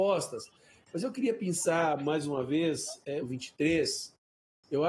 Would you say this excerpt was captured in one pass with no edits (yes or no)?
no